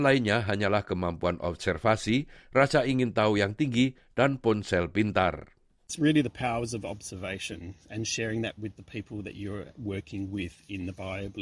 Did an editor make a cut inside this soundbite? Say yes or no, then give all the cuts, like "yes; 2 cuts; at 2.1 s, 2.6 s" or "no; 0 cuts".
no; 0 cuts